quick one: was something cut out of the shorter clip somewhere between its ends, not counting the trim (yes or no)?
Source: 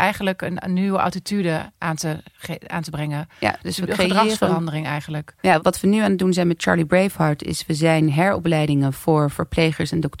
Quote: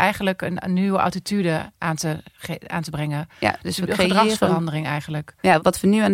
no